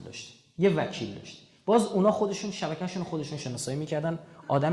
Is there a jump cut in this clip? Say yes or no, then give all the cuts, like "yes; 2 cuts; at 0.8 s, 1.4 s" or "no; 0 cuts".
no; 0 cuts